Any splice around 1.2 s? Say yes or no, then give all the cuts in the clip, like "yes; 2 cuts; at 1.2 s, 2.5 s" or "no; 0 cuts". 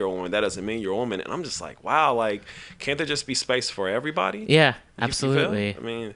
no; 0 cuts